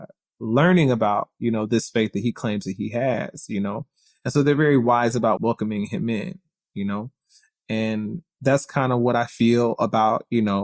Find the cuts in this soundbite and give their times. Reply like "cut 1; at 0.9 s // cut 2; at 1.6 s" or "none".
cut 1; at 5.4 s